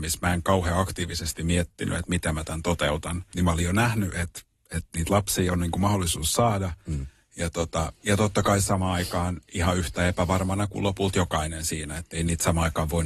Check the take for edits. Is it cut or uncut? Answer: cut